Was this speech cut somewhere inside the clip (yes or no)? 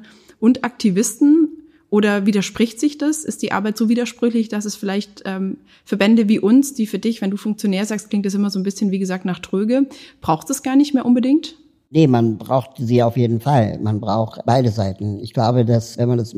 no